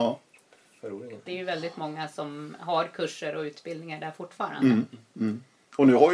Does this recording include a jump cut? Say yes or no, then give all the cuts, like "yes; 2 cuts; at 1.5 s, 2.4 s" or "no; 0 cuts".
yes; 1 cut; at 1.3 s